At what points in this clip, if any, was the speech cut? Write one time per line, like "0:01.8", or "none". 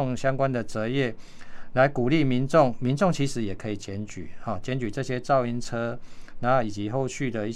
none